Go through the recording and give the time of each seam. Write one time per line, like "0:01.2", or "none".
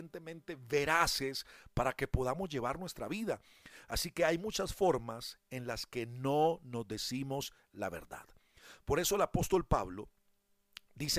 none